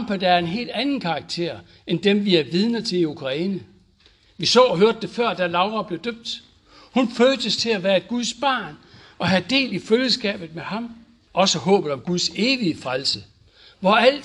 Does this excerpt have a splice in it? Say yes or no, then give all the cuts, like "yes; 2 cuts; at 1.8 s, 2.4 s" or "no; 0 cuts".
yes; 2 cuts; at 4.2 s, 11.3 s